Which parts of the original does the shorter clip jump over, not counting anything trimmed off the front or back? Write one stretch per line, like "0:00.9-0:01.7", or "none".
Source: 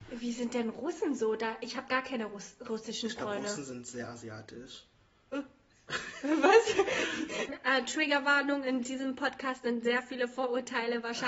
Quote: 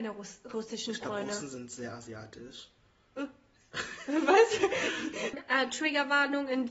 none